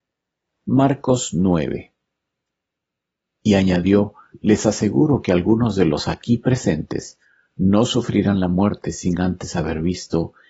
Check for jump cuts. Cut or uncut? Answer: uncut